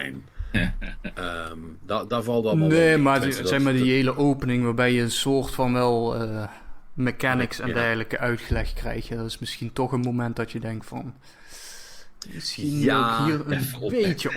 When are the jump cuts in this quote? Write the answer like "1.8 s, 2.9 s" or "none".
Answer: none